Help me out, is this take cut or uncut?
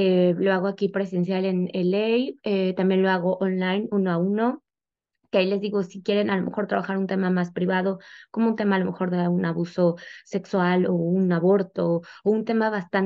uncut